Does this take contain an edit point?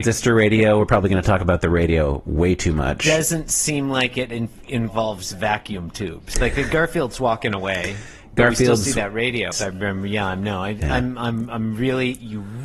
yes; 2 cuts; at 6.3 s, 9.5 s

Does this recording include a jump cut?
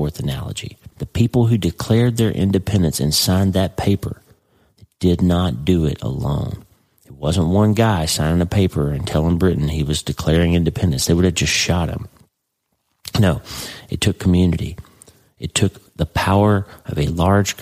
yes; 1 cut; at 0.9 s

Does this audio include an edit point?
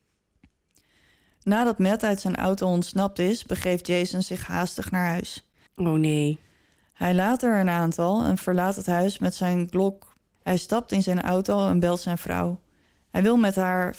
yes; 2 cuts; at 5.7 s, 10.3 s

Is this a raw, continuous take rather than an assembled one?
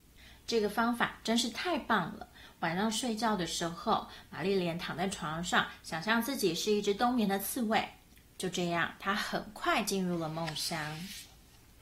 yes; 0 cuts

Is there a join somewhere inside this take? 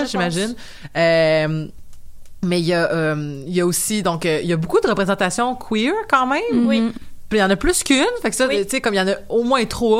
no; 0 cuts

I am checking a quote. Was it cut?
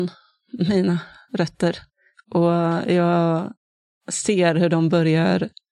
no; 0 cuts

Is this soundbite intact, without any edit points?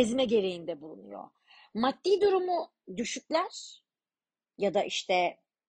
yes; 0 cuts

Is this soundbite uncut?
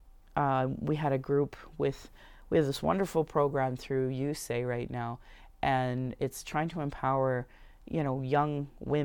no; 1 cut; at 6.4 s

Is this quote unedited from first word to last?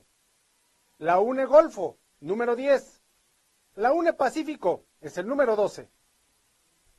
no; 1 cut; at 4.9 s

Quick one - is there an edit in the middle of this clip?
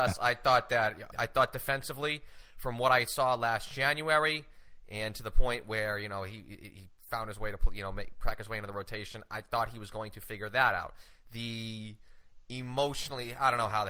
yes; 1 cut; at 1.1 s

